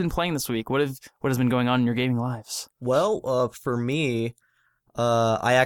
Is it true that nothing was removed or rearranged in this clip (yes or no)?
yes